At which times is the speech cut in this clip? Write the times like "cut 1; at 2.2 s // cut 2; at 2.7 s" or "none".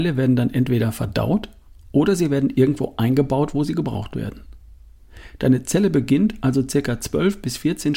none